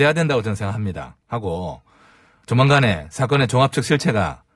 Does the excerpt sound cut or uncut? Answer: uncut